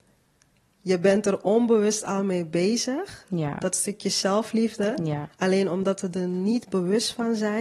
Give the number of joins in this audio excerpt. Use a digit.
0